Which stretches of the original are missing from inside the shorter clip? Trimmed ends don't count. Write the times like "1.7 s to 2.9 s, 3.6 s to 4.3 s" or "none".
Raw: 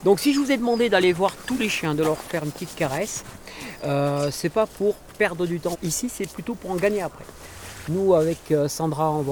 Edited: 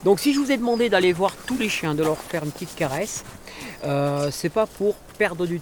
none